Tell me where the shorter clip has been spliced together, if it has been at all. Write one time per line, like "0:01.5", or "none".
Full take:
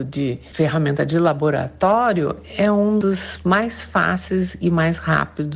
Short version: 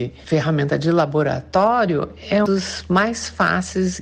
0:02.4